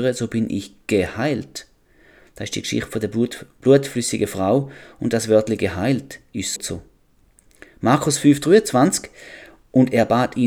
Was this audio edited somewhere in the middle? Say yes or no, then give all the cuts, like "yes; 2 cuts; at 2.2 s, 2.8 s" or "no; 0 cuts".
yes; 1 cut; at 6.6 s